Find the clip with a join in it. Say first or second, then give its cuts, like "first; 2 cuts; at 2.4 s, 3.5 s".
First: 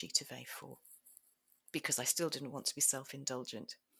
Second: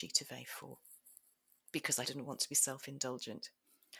second; 1 cut; at 2.0 s